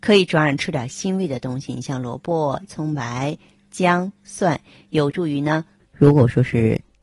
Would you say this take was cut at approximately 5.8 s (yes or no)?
yes